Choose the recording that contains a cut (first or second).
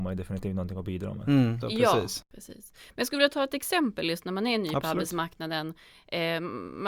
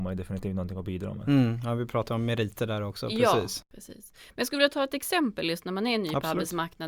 first